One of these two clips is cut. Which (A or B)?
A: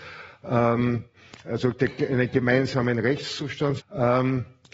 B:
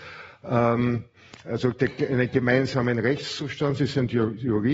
A